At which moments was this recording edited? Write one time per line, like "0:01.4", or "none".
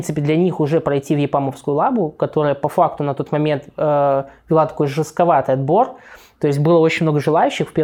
none